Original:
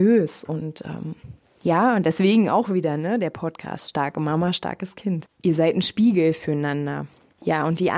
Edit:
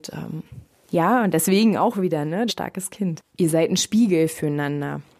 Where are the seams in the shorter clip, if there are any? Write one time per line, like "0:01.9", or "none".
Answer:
0:02.5